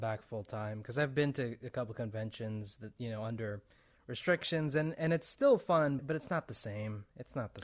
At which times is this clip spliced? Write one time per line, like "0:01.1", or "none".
0:06.0